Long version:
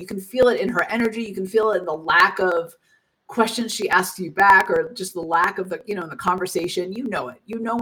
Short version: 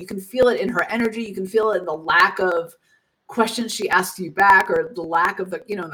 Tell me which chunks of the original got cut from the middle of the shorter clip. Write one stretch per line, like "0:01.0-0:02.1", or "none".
0:04.9-0:05.1